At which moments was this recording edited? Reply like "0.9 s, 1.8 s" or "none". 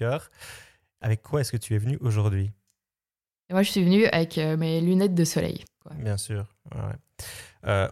5.8 s